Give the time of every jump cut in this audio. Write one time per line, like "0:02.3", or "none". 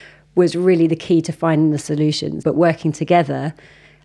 0:02.4